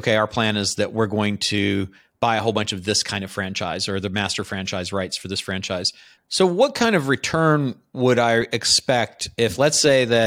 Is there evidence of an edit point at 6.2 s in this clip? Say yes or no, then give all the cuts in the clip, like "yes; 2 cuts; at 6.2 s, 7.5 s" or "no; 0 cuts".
yes; 1 cut; at 6.2 s